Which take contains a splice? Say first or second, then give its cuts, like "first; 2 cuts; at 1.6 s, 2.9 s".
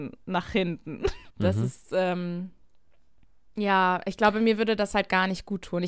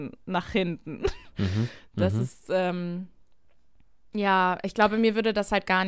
first; 1 cut; at 1.3 s